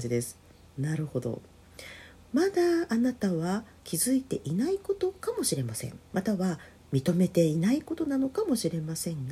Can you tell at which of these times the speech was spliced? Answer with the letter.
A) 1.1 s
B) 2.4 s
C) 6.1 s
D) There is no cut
C